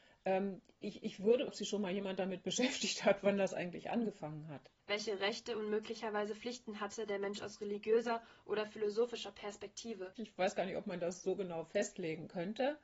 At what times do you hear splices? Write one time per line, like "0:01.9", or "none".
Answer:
0:01.5
0:04.8
0:10.2